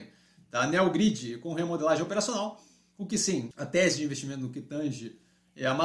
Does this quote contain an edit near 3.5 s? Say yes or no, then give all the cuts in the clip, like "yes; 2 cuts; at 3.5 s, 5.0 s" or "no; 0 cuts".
yes; 1 cut; at 3.5 s